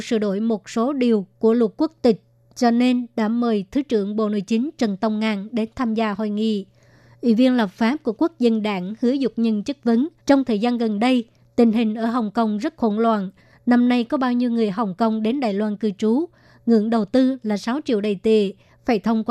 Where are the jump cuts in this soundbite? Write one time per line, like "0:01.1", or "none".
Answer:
0:10.2

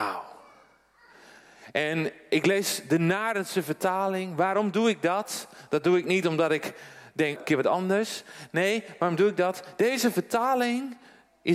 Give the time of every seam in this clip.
0:07.3

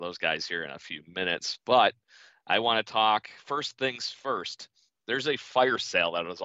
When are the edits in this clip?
none

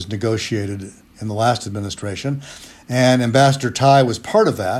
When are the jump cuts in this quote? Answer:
none

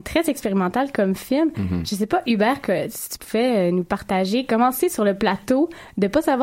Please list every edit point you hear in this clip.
none

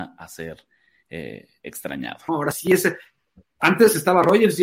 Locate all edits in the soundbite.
0:02.3

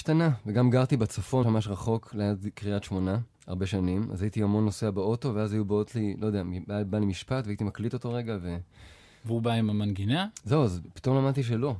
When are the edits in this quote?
0:01.4
0:03.3

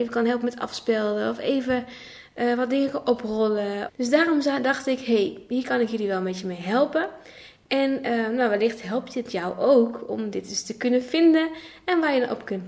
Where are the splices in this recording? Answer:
0:03.9

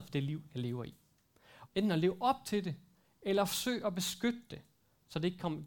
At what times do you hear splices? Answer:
0:01.7

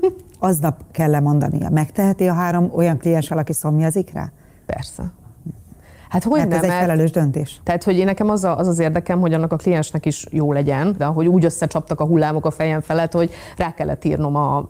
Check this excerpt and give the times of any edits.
0:07.6
0:11.0

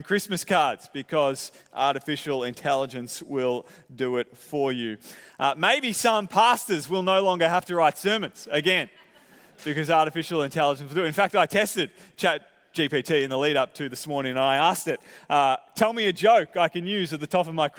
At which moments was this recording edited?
none

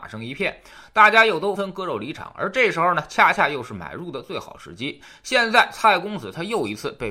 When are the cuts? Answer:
0:01.6

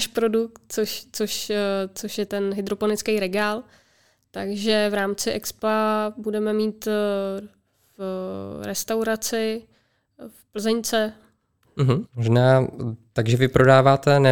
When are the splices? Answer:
0:02.3
0:12.0

